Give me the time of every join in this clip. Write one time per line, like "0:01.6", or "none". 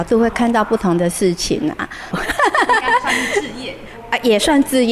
0:02.1